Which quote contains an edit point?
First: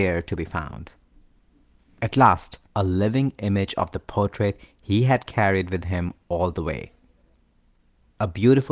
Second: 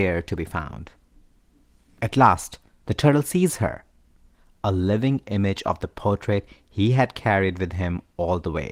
first; 1 cut; at 2.7 s

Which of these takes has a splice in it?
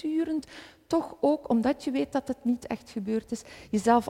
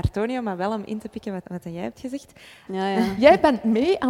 second; 2 cuts; at 1.4 s, 2.7 s

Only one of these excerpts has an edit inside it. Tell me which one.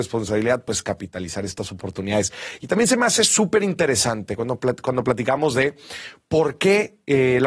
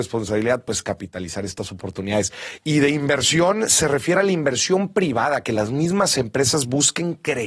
second; 1 cut; at 2.6 s

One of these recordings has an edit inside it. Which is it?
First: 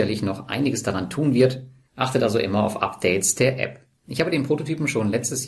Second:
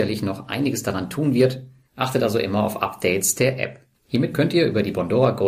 second; 1 cut; at 3.9 s

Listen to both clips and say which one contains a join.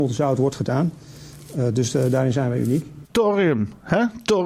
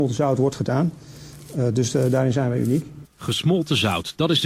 first; 1 cut; at 3.1 s

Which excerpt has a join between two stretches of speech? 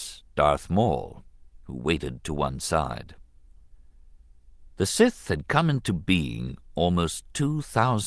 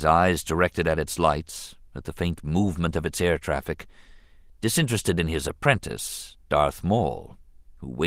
first; 1 cut; at 4.7 s

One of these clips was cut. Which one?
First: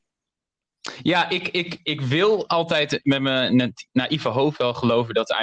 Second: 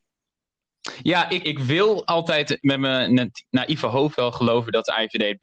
second; 1 cut; at 1.4 s

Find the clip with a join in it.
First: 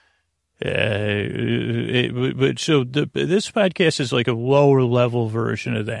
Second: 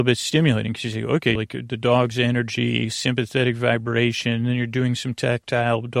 second; 1 cut; at 1.4 s

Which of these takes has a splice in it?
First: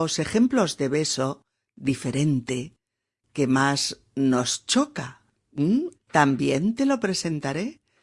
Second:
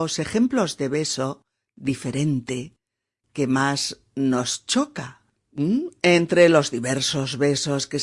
first; 1 cut; at 5.9 s

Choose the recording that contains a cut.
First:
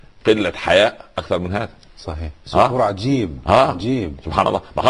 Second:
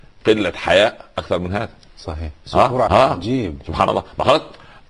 second; 1 cut; at 2.9 s

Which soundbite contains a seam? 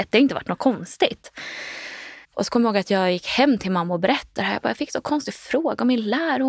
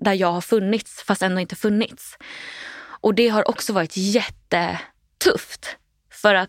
first; 1 cut; at 2.2 s

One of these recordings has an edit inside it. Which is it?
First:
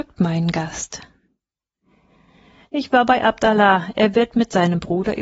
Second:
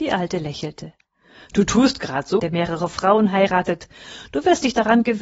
second; 1 cut; at 2.4 s

